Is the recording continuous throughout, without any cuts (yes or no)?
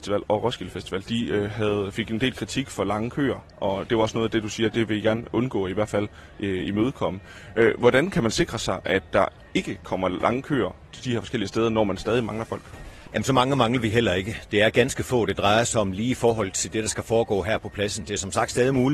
yes